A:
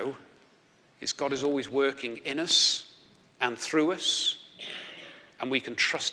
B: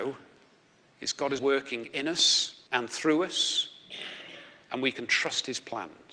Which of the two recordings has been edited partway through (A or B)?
B